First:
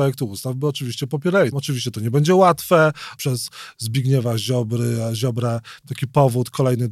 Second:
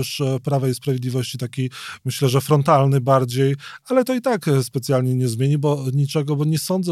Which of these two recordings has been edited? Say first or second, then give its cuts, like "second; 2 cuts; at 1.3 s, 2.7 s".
first; 2 cuts; at 1.5 s, 3.2 s